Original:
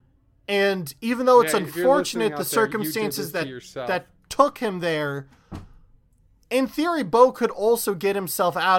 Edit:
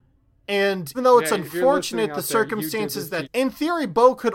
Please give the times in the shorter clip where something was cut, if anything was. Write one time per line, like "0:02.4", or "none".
0:00.9
0:03.2